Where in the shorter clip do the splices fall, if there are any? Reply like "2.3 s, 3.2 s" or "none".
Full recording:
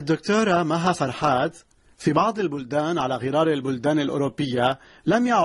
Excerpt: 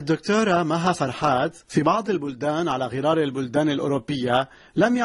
1.6 s